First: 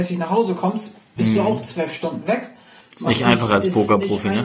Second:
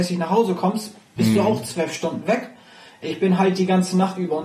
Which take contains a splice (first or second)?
first